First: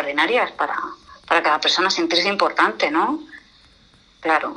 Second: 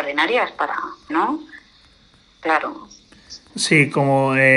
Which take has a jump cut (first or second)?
second